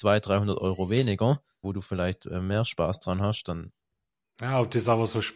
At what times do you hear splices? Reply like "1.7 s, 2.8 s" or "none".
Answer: 1.6 s